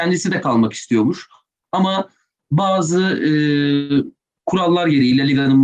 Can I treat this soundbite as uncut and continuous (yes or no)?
yes